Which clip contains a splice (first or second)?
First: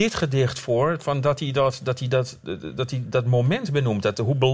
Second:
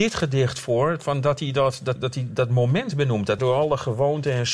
second